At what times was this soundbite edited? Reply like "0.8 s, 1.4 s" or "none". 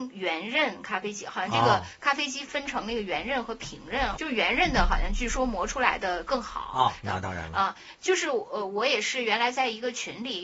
2.4 s, 4.1 s, 7.0 s

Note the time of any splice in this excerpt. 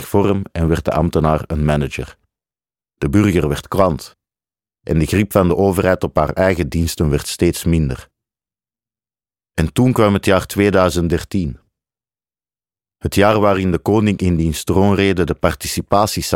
2.8 s

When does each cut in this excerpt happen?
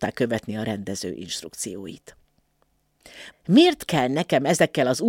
3.3 s

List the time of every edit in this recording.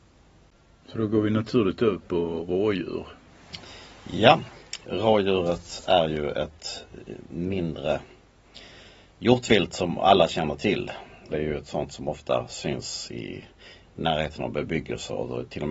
4.8 s, 11.3 s

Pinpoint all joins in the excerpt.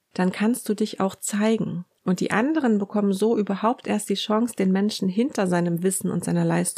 none

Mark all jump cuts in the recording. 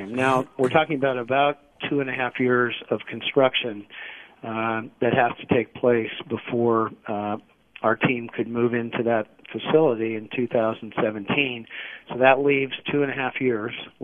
none

